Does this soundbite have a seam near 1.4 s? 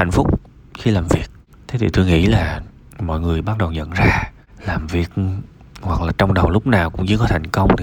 no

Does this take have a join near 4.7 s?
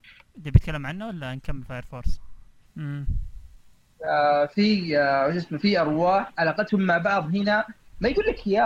no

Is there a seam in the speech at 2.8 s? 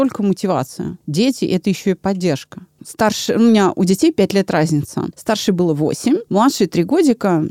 yes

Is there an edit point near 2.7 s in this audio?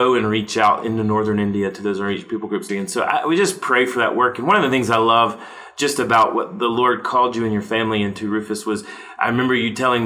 yes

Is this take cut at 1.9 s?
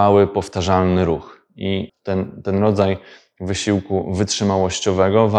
no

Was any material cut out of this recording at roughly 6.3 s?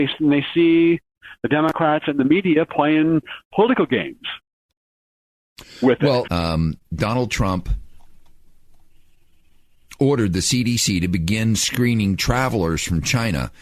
yes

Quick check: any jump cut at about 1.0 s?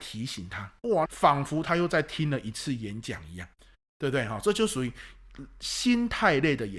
yes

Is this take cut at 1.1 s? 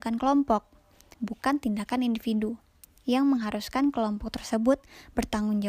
yes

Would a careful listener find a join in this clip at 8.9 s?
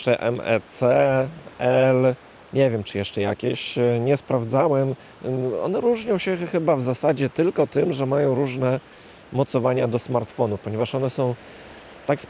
no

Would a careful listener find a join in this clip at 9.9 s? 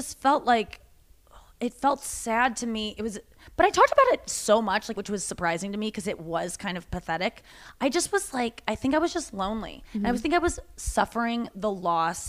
no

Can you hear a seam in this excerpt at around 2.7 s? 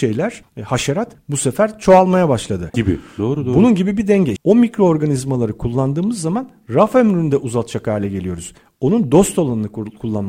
yes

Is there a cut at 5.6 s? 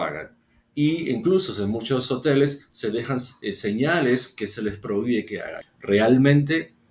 yes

